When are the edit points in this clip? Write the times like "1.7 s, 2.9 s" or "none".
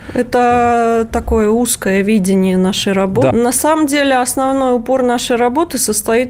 3.3 s